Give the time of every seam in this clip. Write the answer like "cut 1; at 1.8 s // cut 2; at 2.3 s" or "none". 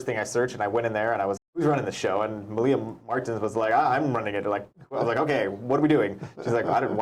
cut 1; at 1.4 s

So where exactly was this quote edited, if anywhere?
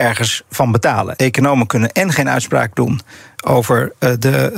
cut 1; at 1.2 s

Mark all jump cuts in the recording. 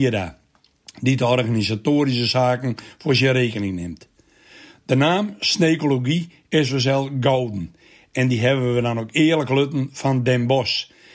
none

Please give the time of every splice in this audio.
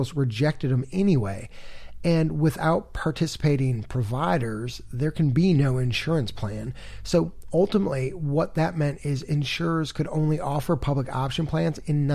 none

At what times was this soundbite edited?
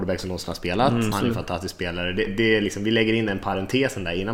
cut 1; at 1.1 s // cut 2; at 2.3 s

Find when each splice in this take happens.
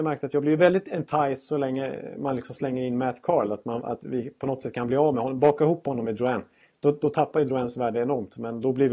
none

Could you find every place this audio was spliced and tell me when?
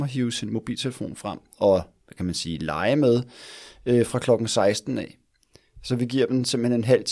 none

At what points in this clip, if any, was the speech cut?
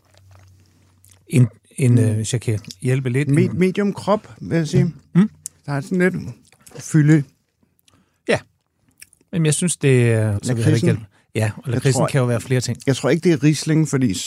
cut 1; at 10.4 s

